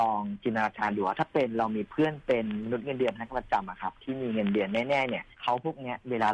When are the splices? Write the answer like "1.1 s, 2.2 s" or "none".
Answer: 5.3 s